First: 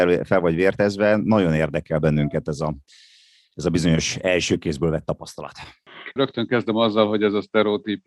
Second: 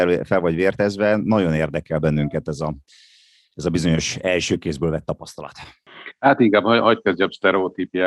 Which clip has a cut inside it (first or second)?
first